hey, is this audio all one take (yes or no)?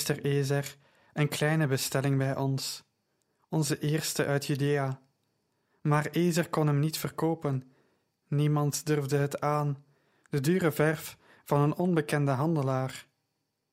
yes